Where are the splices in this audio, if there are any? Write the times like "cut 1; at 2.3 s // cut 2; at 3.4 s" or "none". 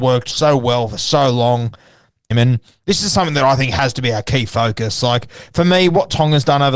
cut 1; at 2.3 s